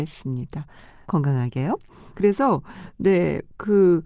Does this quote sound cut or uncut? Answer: cut